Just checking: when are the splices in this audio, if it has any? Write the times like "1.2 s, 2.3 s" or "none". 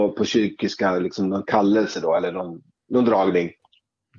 none

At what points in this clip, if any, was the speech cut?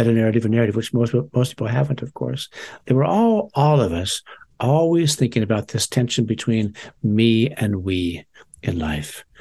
none

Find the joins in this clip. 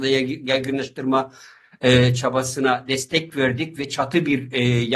none

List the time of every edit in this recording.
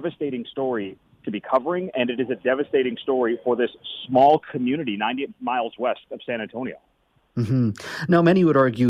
none

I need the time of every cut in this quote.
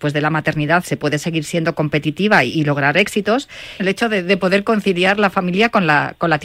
3.8 s

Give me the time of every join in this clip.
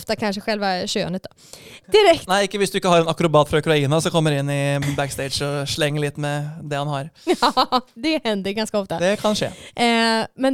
1.8 s

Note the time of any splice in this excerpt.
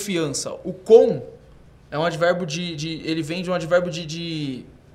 none

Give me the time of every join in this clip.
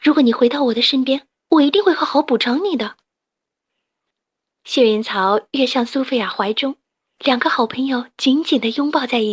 none

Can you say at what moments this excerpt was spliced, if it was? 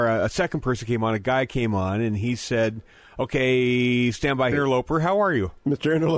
4.5 s

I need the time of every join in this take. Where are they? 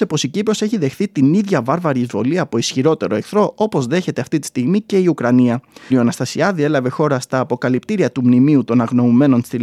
5.9 s

